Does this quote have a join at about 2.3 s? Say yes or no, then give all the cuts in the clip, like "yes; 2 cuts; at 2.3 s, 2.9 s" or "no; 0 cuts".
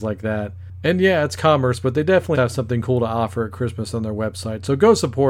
yes; 1 cut; at 2.3 s